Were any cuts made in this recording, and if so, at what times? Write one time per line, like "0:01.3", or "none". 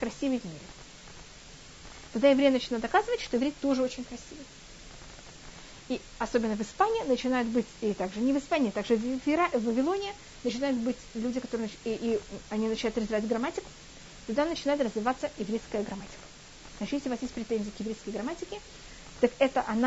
none